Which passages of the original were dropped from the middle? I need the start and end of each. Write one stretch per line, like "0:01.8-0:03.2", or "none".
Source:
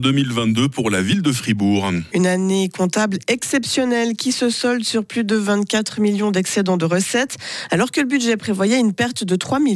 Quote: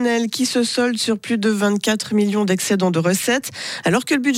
none